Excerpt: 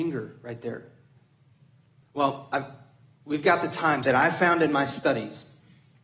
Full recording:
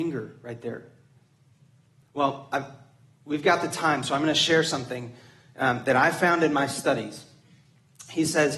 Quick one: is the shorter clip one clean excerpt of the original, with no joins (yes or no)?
no